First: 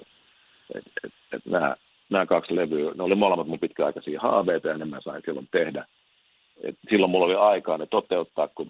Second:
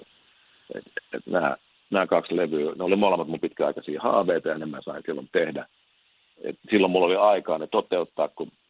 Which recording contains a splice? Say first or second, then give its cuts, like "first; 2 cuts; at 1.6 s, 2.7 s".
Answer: second; 1 cut; at 1.0 s